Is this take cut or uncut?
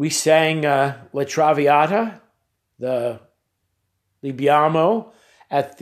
uncut